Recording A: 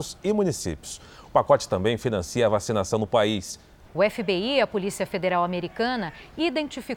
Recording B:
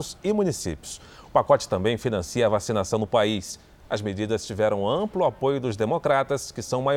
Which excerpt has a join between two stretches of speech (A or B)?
A